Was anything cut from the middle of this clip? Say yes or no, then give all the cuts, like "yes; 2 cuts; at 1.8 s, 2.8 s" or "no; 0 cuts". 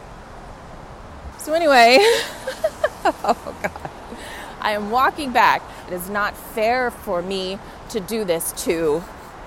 yes; 2 cuts; at 1.3 s, 5.9 s